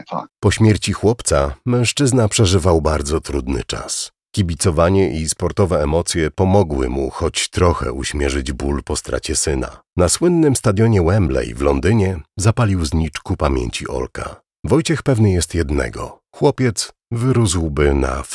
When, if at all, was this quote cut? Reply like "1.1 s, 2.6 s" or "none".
9.9 s, 14.6 s